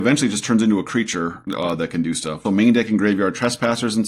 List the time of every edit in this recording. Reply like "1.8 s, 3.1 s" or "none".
2.5 s